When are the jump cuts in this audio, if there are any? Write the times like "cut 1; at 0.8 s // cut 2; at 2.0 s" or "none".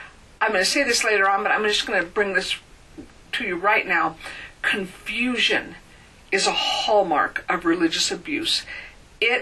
none